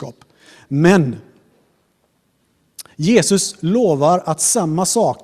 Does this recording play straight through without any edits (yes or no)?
yes